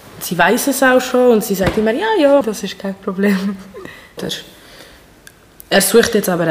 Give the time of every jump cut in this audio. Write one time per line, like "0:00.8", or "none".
0:02.4
0:04.2